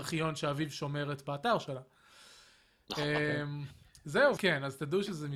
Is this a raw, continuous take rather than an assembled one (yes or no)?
no